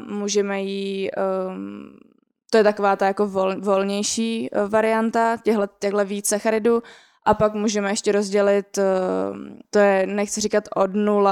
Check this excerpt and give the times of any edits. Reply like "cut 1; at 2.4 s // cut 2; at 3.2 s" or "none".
cut 1; at 9.6 s

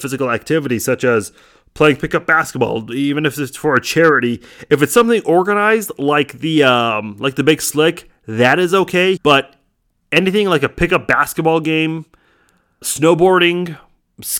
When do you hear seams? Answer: cut 1; at 9.2 s // cut 2; at 12.8 s

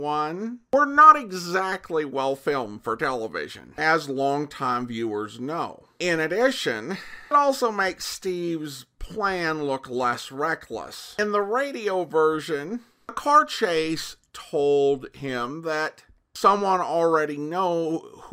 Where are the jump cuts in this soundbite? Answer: none

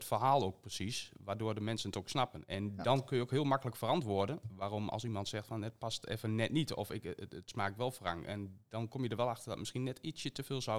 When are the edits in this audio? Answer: none

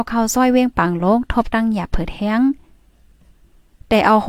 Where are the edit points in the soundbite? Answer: none

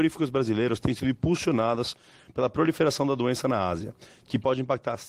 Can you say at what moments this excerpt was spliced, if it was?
none

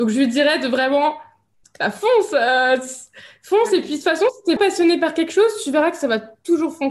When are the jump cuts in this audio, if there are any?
cut 1; at 4.6 s

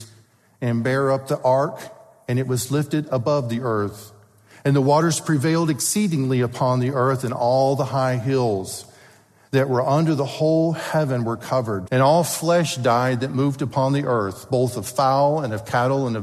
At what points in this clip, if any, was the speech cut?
cut 1; at 11.9 s

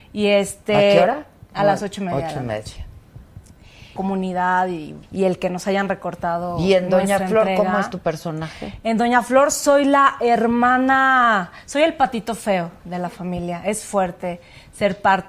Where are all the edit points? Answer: cut 1; at 4.0 s // cut 2; at 5.0 s

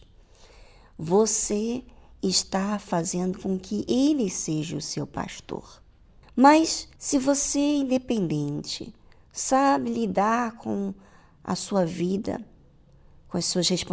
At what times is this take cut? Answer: cut 1; at 7.0 s

